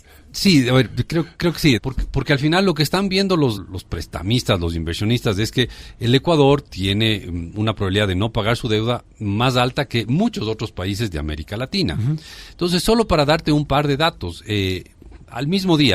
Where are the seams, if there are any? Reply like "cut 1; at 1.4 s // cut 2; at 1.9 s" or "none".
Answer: cut 1; at 1.8 s // cut 2; at 3.5 s

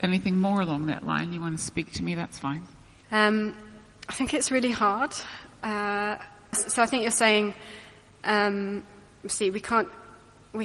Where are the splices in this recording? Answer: cut 1; at 3.0 s // cut 2; at 6.5 s

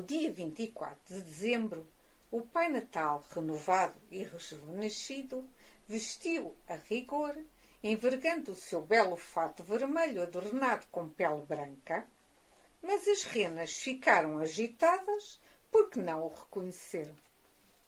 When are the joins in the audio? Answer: cut 1; at 2.2 s // cut 2; at 12.7 s

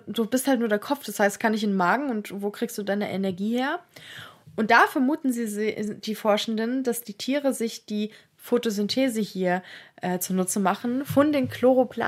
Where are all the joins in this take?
none

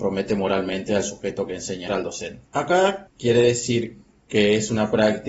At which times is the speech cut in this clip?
cut 1; at 1.9 s // cut 2; at 3.1 s

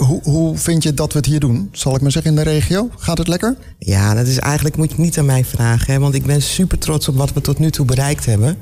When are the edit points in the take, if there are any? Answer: cut 1; at 4.9 s

